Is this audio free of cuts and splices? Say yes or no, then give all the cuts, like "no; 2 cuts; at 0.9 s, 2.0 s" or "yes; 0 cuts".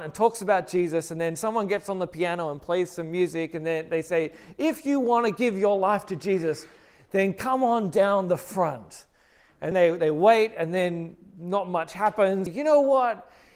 no; 2 cuts; at 9.7 s, 12.5 s